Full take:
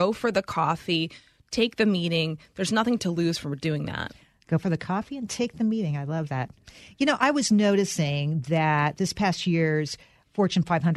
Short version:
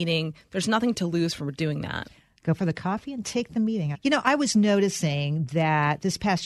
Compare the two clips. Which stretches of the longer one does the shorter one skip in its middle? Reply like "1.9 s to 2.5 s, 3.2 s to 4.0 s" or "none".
6.0 s to 6.9 s